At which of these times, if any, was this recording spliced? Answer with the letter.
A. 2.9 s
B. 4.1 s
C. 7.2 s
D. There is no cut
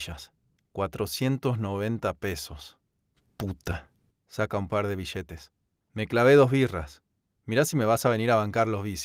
B